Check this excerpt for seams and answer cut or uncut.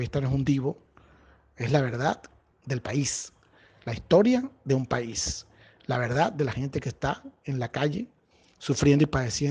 uncut